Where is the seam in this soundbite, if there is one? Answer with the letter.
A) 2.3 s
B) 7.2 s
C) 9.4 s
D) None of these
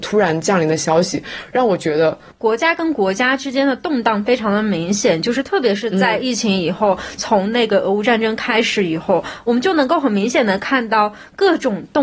A